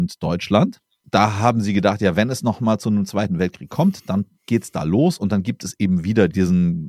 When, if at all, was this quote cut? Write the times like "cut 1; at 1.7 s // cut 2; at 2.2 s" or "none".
cut 1; at 1.0 s